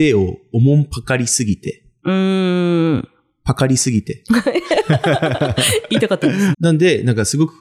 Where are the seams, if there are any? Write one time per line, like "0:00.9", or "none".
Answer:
0:06.5